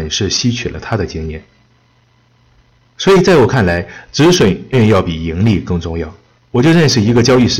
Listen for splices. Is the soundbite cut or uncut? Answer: cut